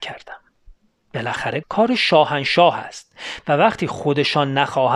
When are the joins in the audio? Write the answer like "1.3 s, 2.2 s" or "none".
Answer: 1.6 s